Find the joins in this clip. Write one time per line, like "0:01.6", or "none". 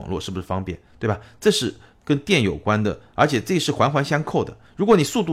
none